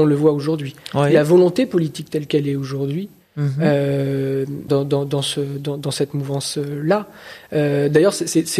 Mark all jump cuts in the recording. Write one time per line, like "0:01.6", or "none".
0:04.7